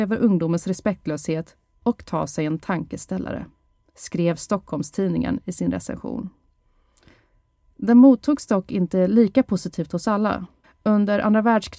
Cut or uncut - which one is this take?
cut